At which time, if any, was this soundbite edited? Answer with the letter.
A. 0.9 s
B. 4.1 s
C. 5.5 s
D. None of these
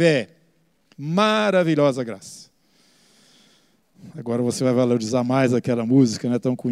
A